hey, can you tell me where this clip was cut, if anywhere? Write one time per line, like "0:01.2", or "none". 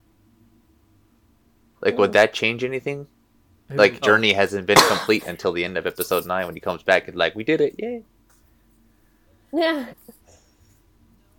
0:04.0
0:09.9